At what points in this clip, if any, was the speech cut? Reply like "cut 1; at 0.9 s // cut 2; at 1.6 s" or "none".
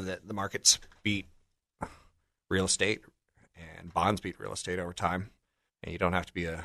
cut 1; at 5.7 s